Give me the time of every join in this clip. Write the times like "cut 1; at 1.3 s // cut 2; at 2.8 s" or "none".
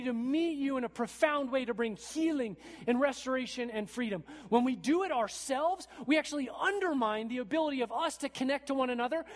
none